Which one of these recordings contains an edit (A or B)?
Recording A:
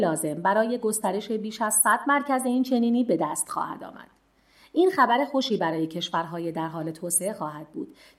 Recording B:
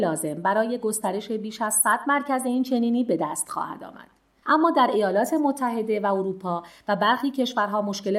B